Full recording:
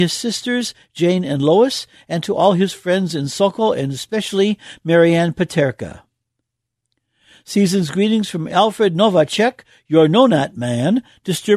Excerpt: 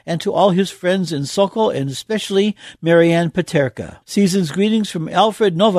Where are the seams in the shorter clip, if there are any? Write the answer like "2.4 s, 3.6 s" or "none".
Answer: 4.0 s